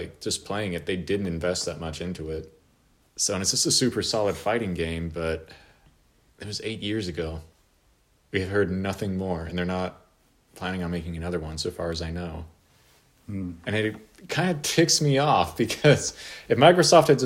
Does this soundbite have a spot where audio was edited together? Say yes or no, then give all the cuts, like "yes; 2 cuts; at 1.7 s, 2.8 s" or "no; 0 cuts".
yes; 1 cut; at 3.0 s